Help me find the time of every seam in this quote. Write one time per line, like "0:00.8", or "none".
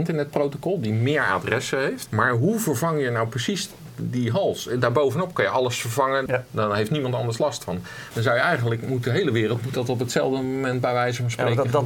0:02.1
0:06.3
0:08.1